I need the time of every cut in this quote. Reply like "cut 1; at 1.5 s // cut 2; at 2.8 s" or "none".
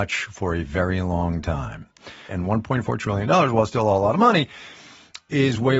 cut 1; at 2.3 s